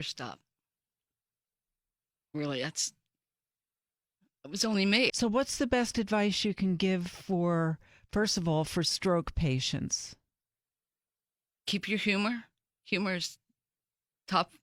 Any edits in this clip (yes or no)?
yes